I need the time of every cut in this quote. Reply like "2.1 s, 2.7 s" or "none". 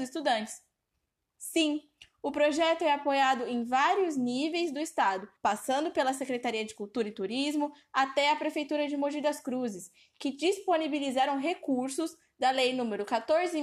1.3 s, 5.4 s